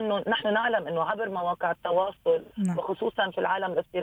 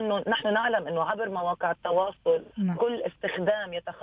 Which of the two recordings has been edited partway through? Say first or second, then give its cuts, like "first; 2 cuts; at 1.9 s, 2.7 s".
second; 1 cut; at 2.8 s